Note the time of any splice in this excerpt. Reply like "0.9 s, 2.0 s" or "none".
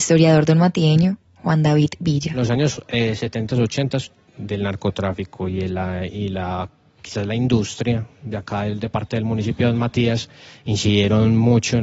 4.3 s